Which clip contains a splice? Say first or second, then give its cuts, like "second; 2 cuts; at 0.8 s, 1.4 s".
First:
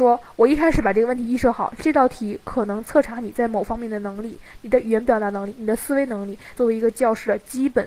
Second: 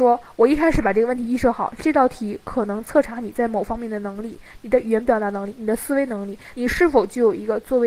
first; 1 cut; at 6.6 s